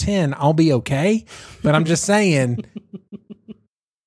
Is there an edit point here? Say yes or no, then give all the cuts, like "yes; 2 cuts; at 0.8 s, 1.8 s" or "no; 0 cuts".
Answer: no; 0 cuts